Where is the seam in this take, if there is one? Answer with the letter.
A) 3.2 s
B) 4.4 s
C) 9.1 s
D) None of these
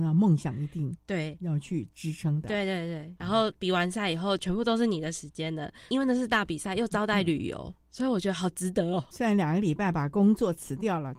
A